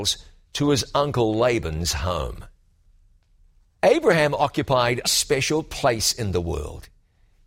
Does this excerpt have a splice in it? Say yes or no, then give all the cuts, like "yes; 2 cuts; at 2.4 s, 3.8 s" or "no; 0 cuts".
yes; 1 cut; at 5.0 s